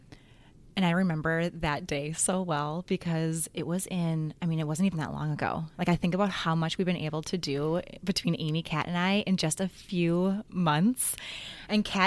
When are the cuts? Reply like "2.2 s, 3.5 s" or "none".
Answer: none